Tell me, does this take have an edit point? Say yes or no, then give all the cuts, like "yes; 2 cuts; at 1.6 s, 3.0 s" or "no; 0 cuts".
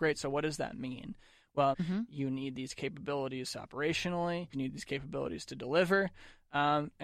yes; 2 cuts; at 1.7 s, 4.5 s